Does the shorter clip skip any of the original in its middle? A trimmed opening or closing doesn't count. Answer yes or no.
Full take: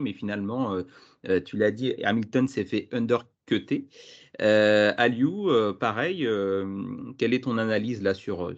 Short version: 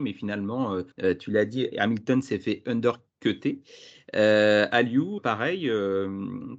yes